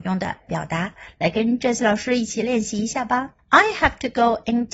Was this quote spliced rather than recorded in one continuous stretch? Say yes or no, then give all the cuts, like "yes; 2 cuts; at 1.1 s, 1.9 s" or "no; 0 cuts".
no; 0 cuts